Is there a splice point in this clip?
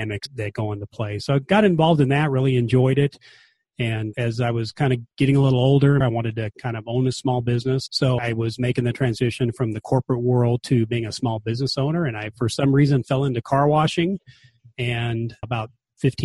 yes; 1 cut; at 6.0 s

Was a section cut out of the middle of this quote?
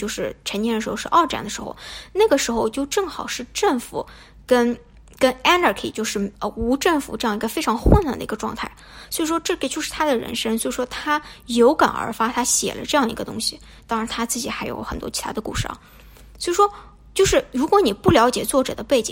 no; 0 cuts

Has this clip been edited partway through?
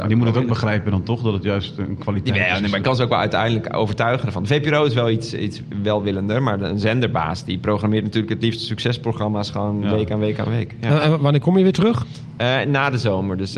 no; 0 cuts

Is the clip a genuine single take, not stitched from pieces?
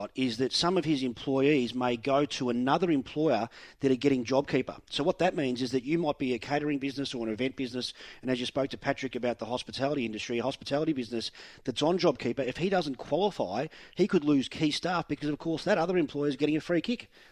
yes; 0 cuts

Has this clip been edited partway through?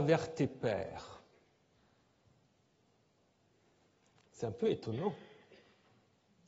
no; 0 cuts

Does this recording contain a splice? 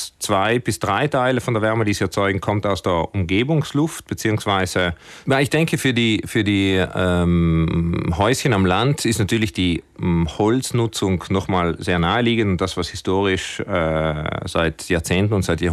yes; 1 cut; at 5.2 s

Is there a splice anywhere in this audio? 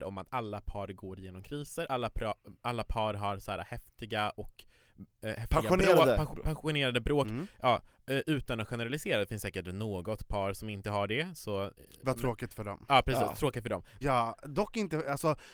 yes; 1 cut; at 14.0 s

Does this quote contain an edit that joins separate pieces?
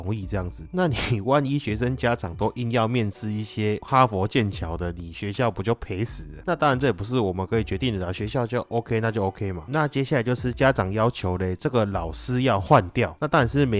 no; 0 cuts

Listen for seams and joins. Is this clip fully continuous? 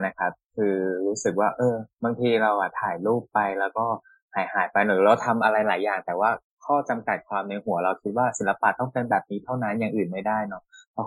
yes; 0 cuts

